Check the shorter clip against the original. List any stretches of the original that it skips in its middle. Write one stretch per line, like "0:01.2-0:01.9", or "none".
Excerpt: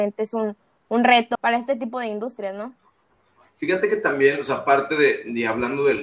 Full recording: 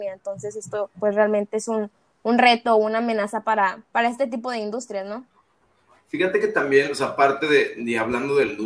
0:02.7-0:03.9